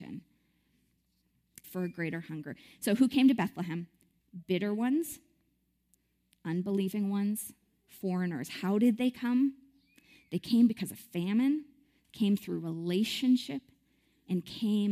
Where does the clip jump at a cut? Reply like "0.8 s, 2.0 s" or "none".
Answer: 1.6 s